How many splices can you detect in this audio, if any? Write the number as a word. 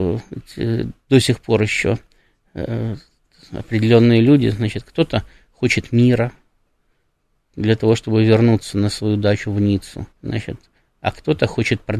one